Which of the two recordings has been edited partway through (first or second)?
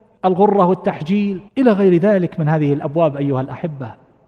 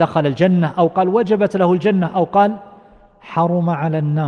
first